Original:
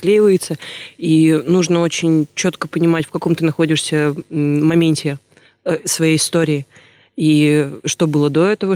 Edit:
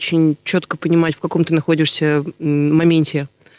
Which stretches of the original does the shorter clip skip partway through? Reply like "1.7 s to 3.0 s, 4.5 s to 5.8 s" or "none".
none